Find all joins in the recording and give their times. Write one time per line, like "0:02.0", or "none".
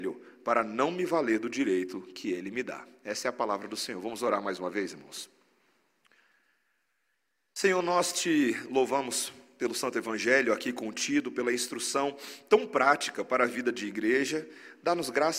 none